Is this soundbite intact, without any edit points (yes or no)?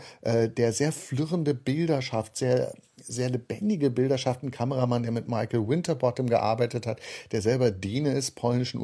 yes